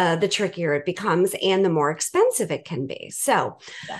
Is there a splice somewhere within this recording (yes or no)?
no